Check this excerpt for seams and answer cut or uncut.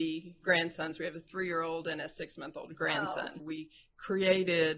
cut